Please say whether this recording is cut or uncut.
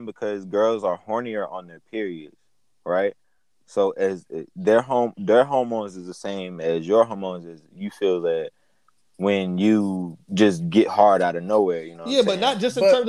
uncut